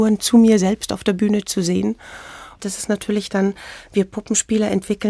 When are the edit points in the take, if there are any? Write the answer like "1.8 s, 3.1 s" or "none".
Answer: 2.6 s